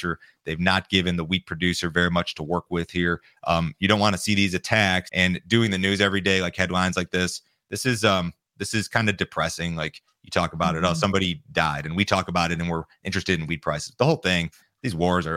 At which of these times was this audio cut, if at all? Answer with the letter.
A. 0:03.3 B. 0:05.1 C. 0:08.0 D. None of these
B